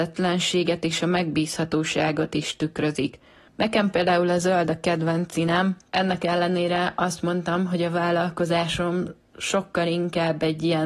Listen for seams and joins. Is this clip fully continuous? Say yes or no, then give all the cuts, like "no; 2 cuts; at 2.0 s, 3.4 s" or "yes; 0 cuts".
yes; 0 cuts